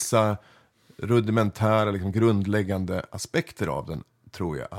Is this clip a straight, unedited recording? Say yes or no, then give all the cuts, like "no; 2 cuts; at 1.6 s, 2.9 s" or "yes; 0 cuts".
yes; 0 cuts